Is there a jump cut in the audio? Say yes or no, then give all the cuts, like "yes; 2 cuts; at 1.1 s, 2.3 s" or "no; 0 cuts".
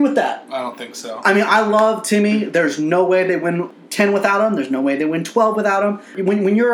no; 0 cuts